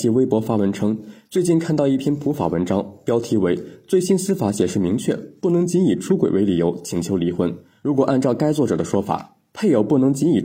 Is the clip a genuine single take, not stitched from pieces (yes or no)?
yes